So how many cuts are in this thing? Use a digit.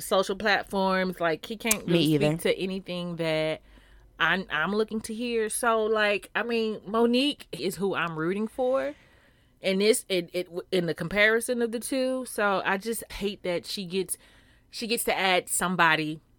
2